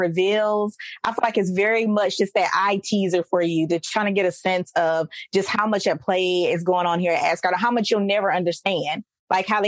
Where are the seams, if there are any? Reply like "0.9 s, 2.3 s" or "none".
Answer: none